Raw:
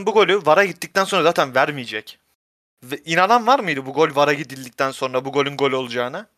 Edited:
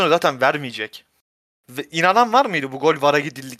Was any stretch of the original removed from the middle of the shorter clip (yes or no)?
no